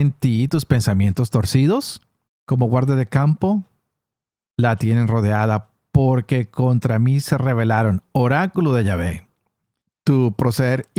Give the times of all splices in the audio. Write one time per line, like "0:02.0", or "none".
0:02.3